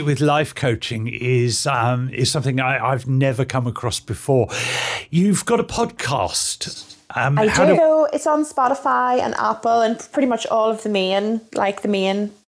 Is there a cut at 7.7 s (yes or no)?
yes